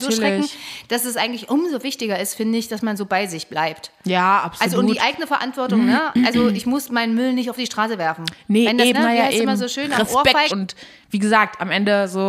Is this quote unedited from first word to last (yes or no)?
no